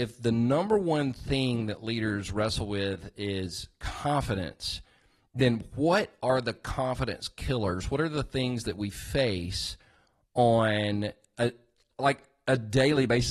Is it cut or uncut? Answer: uncut